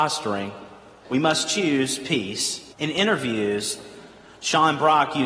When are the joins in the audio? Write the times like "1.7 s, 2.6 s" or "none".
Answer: 1.0 s, 2.7 s